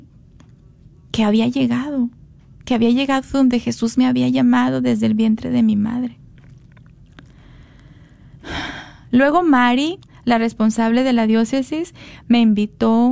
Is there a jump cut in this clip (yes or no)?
no